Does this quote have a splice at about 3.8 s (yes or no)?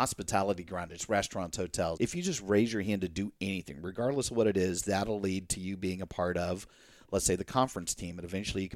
no